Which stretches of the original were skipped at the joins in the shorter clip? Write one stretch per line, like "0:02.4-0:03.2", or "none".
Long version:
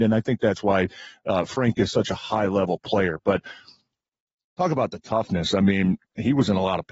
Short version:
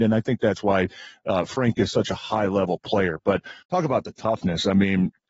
0:03.6-0:04.5